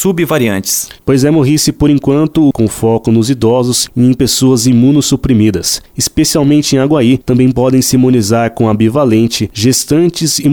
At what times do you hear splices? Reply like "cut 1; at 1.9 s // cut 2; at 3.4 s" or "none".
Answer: cut 1; at 2.5 s